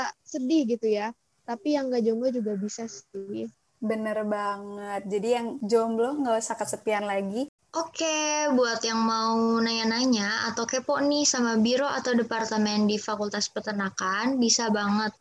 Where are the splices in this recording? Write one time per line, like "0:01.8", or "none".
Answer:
0:07.6